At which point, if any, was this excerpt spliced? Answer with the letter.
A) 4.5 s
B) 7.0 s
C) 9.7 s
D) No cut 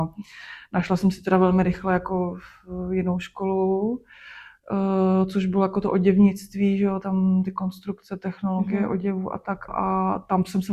C